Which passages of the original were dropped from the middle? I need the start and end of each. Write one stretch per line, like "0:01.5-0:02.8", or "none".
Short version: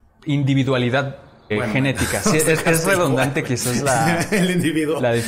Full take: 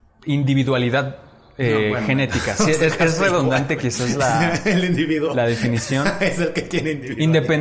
0:01.5-0:01.8